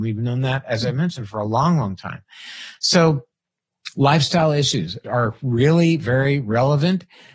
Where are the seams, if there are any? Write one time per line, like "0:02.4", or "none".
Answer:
0:05.0